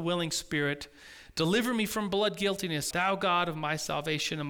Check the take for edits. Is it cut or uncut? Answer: cut